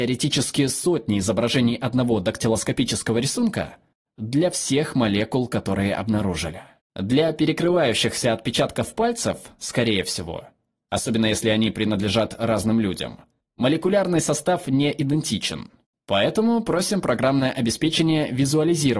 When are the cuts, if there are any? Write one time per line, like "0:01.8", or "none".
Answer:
0:06.8